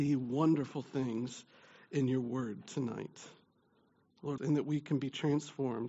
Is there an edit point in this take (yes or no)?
yes